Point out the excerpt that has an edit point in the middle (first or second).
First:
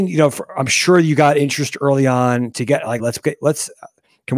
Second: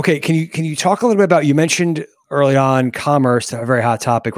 first